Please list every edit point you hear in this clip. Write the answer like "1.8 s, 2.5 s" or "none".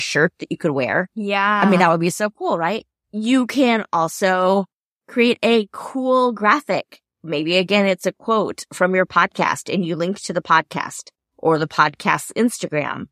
none